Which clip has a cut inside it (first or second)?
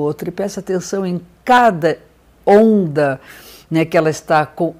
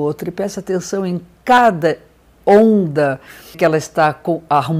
second